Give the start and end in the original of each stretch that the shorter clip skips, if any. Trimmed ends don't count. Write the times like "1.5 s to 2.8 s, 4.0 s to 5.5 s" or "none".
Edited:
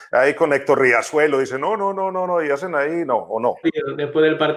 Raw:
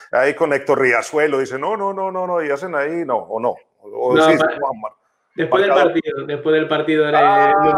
3.6 s to 5.9 s